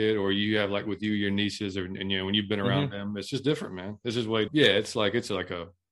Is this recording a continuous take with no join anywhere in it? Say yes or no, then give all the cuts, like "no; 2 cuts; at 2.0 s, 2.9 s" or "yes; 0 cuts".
no; 1 cut; at 4.5 s